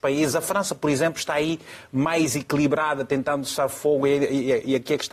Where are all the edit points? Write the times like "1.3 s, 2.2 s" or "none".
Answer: none